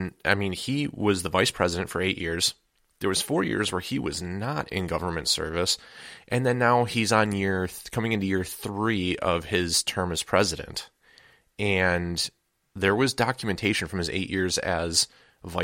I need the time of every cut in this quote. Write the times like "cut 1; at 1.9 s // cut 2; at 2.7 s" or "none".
none